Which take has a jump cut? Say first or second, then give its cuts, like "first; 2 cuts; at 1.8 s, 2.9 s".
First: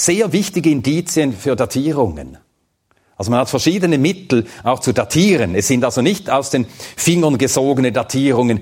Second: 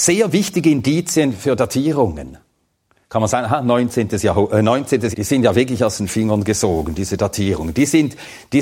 second; 2 cuts; at 3.0 s, 5.1 s